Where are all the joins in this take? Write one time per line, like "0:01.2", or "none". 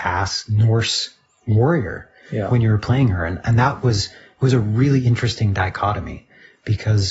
none